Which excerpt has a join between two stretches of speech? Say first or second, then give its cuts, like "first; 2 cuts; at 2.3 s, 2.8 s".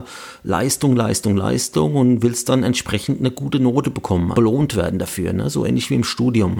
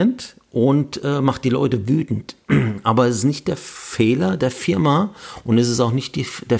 first; 1 cut; at 4.3 s